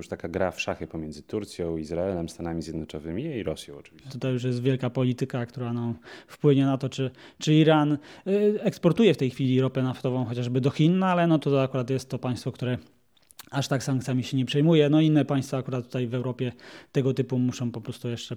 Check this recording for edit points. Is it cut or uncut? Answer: cut